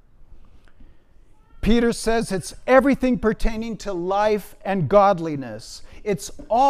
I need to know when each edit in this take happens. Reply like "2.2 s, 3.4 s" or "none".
none